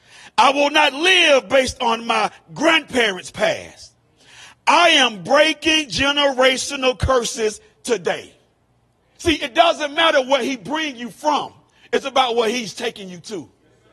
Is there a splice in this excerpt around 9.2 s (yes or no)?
yes